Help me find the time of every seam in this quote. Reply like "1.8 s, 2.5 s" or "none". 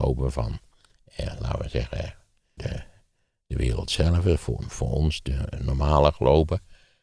2.6 s